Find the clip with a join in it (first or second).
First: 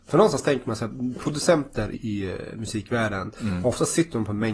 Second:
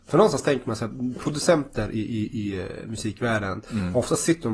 first